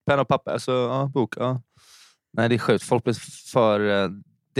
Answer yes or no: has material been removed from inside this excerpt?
no